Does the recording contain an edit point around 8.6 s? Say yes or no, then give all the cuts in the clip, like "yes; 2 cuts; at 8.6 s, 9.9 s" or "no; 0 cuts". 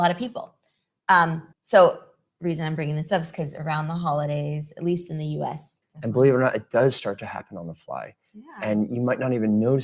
no; 2 cuts; at 1.5 s, 5.8 s